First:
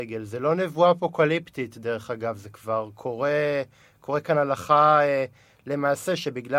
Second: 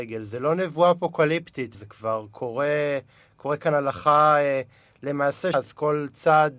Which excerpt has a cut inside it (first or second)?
second